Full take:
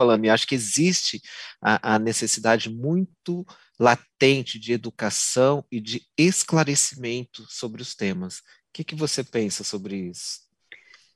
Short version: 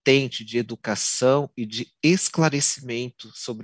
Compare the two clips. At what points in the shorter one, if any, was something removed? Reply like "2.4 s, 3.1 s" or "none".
none